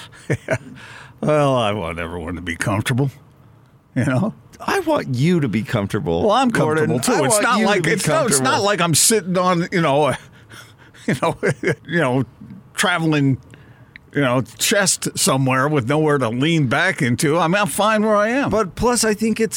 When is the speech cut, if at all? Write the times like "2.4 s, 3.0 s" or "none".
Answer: 11.8 s